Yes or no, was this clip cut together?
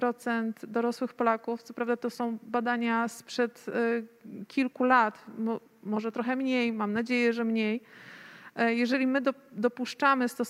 no